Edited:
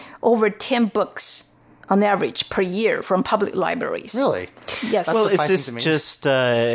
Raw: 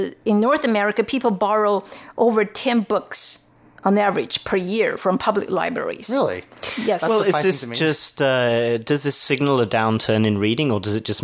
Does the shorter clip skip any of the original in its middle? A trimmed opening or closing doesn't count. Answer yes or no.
no